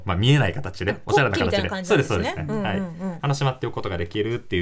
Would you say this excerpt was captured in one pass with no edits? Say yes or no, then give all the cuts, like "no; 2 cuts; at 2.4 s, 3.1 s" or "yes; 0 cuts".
yes; 0 cuts